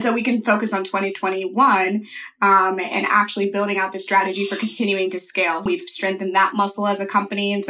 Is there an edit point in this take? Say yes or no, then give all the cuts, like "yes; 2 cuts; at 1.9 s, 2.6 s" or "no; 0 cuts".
yes; 1 cut; at 5.7 s